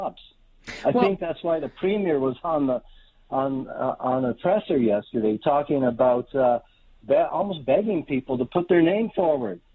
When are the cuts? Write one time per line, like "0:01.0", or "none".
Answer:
none